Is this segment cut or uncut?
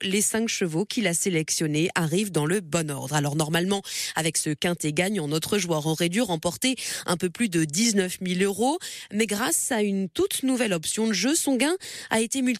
uncut